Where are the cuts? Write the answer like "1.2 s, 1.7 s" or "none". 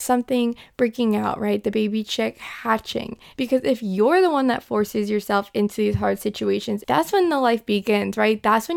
3.3 s, 6.8 s